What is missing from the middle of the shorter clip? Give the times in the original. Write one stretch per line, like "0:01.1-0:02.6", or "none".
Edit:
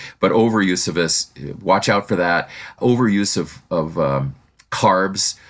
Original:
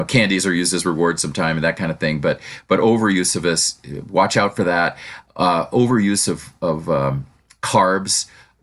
0:05.3-0:05.7